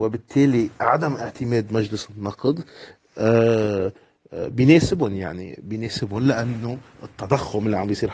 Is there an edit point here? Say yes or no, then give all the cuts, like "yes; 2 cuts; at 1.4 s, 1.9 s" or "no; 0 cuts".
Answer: no; 0 cuts